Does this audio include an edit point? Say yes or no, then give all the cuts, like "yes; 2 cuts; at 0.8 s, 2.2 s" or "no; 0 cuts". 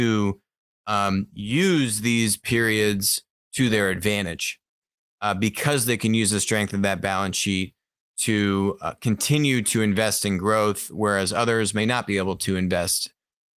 no; 0 cuts